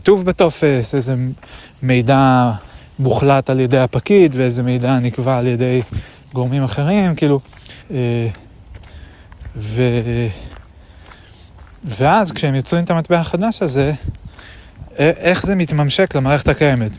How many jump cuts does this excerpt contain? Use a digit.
2